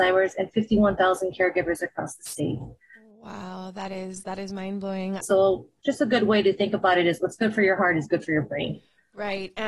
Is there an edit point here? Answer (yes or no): yes